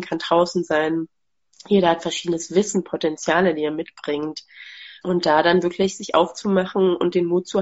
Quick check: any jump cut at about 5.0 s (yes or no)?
yes